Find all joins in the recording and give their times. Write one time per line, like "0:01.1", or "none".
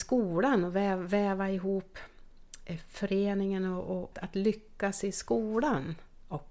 0:04.1